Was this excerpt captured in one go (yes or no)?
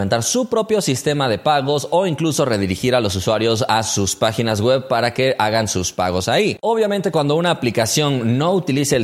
yes